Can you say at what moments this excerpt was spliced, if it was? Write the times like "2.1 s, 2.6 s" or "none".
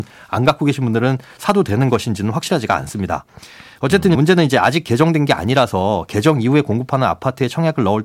4.1 s